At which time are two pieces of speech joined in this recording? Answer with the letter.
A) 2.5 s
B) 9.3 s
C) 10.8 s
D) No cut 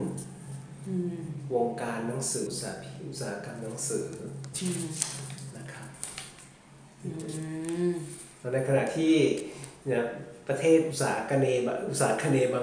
A